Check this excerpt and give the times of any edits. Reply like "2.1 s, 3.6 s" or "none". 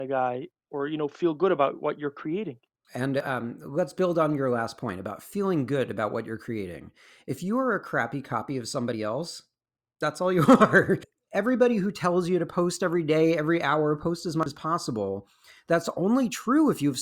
2.8 s, 11.0 s